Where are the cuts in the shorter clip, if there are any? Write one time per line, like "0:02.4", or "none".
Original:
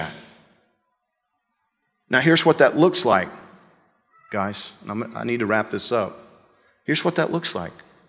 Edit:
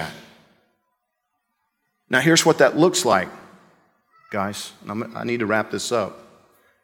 none